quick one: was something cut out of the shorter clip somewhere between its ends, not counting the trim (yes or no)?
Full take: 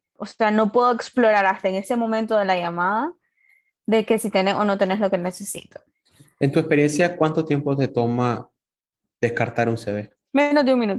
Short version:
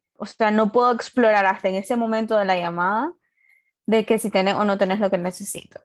no